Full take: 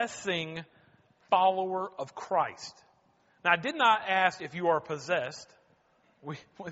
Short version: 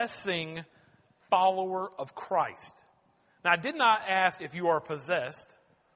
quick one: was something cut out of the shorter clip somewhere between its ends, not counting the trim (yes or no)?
no